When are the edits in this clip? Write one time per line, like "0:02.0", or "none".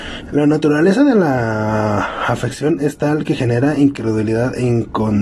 none